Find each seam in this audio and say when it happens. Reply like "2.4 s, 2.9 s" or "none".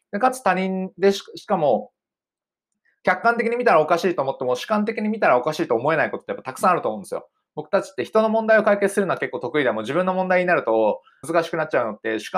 11.2 s